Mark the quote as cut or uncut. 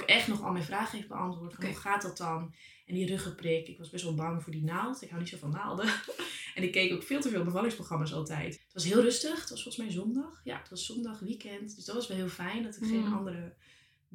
cut